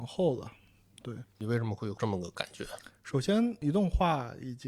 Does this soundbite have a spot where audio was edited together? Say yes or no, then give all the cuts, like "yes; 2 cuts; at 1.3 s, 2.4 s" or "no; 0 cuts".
no; 0 cuts